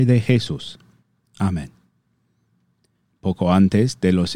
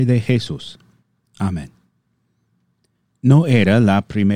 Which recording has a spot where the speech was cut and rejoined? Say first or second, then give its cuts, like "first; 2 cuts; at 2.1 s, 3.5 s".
first; 1 cut; at 3.1 s